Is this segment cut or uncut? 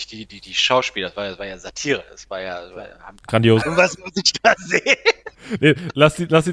cut